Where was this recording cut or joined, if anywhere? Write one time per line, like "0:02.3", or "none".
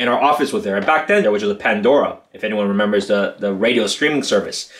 0:01.2